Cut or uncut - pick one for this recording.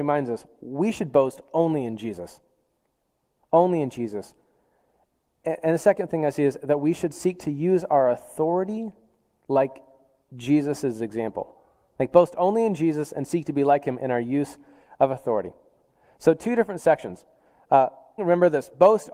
cut